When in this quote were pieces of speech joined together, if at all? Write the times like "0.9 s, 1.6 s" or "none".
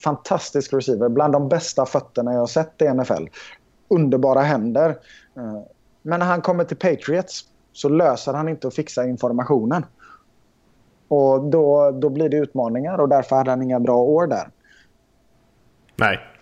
none